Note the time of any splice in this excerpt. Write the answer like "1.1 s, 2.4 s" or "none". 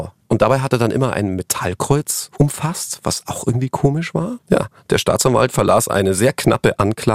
4.4 s